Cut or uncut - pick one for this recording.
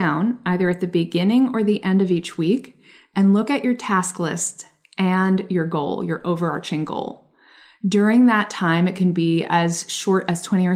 uncut